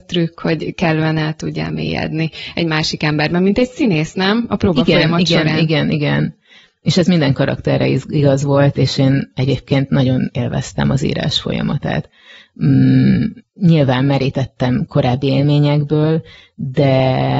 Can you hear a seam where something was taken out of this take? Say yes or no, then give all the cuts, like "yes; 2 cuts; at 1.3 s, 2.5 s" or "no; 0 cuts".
no; 0 cuts